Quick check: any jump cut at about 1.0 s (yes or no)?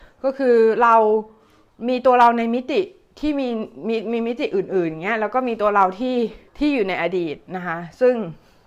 no